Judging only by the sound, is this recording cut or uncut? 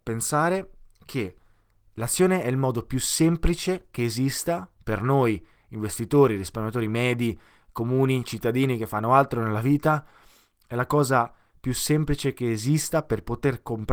uncut